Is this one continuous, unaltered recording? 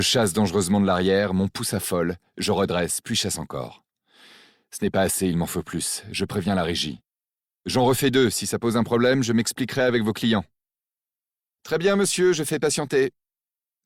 yes; 0 cuts

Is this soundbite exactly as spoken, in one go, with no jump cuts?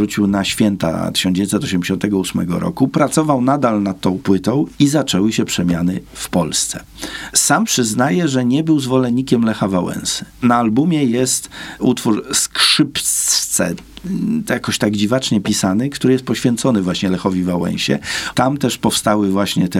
no; 1 cut; at 18.3 s

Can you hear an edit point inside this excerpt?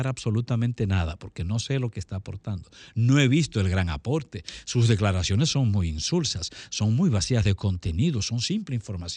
no; 0 cuts

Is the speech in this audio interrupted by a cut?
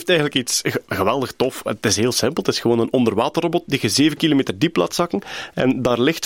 no; 0 cuts

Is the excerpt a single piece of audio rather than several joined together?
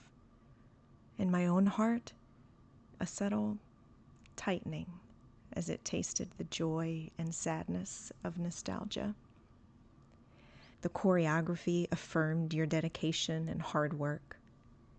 no; 2 cuts; at 3.0 s, 10.7 s

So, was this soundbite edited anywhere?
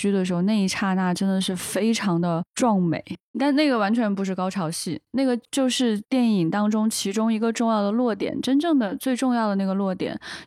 yes; 1 cut; at 3.3 s

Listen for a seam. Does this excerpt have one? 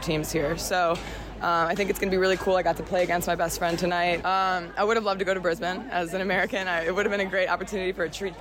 yes; 1 cut; at 4.2 s

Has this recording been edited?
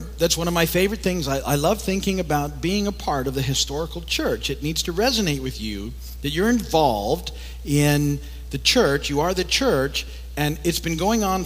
no; 0 cuts

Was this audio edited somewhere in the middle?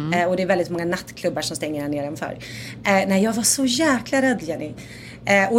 no; 0 cuts

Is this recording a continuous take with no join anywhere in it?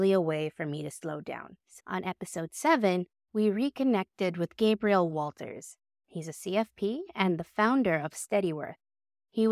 yes; 0 cuts

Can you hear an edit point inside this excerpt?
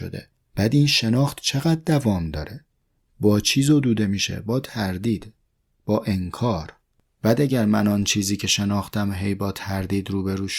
no; 0 cuts

